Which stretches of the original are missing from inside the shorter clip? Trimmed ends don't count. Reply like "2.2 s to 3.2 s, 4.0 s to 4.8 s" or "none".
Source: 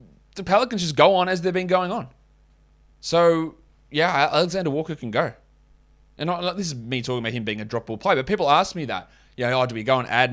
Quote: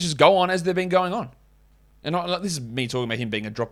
2.7 s to 6.1 s